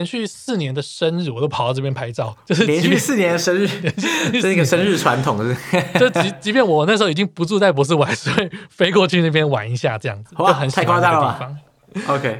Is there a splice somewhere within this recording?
no; 0 cuts

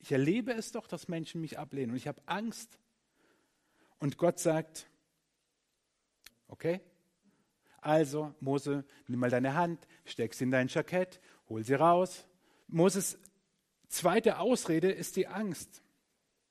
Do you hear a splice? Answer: yes; 2 cuts; at 6.3 s, 12.6 s

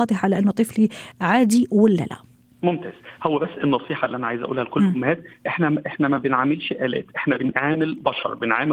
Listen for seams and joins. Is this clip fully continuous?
yes; 0 cuts

